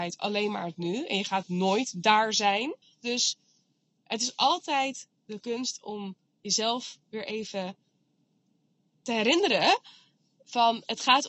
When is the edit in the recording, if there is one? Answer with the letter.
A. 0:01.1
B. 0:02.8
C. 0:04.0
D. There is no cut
B